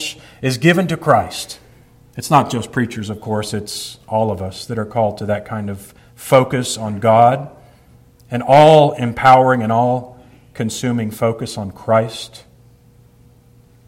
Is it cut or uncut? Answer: uncut